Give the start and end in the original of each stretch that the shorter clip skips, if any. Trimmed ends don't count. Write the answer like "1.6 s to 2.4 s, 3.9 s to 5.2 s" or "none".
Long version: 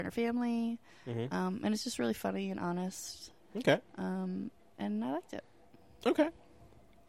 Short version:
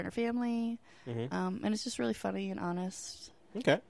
none